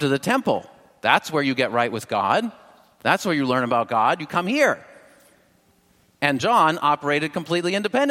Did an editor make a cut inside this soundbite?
no; 0 cuts

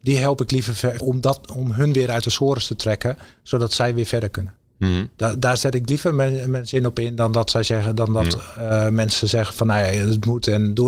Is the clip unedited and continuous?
no; 1 cut; at 1.0 s

